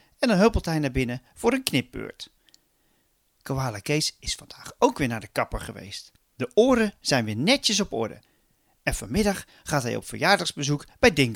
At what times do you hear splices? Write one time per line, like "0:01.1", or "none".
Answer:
none